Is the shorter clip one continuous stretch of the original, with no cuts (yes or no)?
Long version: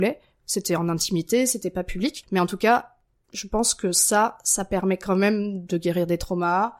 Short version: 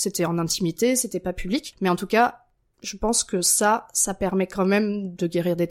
yes